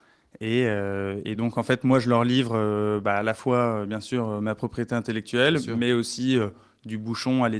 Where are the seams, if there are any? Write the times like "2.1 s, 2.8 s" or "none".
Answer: none